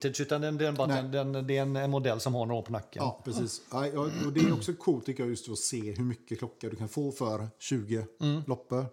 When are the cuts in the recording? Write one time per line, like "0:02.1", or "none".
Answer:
none